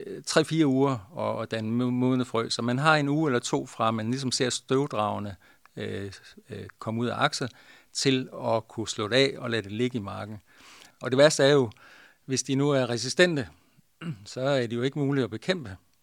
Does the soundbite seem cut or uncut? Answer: cut